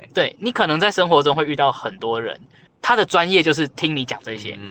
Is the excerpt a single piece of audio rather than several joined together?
no; 1 cut; at 2.7 s

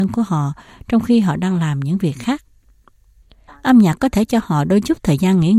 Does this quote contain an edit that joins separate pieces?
yes; 1 cut; at 3.5 s

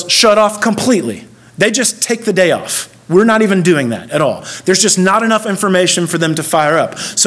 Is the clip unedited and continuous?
yes; 0 cuts

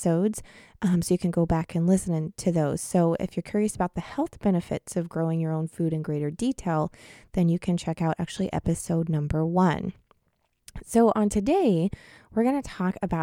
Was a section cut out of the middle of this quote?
no; 0 cuts

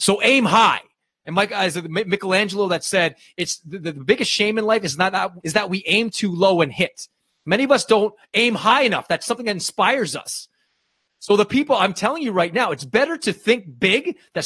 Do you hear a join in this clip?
yes; 1 cut; at 5.4 s

